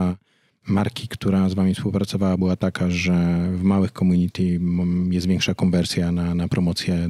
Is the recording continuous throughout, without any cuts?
yes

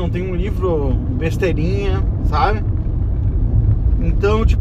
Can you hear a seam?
no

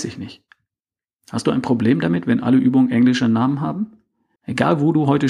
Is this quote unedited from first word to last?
no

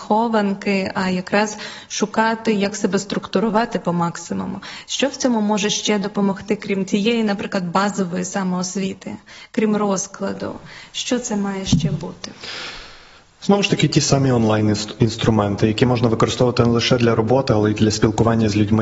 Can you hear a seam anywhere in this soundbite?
no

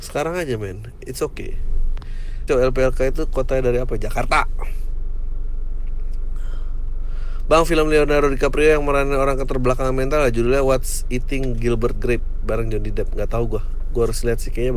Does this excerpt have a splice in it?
yes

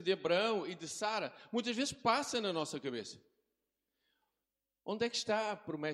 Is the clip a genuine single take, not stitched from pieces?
yes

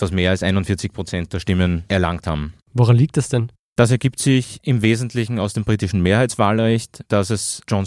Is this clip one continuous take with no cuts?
yes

